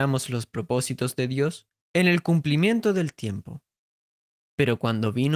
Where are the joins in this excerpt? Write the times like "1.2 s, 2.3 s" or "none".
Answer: 1.8 s